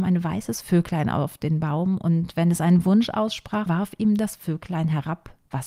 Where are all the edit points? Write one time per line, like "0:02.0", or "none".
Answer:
0:03.7